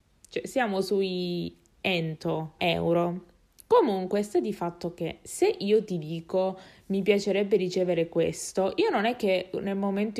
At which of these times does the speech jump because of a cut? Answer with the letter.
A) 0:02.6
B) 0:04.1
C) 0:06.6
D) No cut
A